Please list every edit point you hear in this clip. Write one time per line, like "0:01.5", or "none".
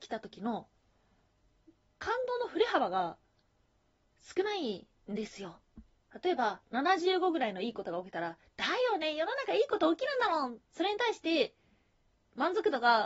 0:10.7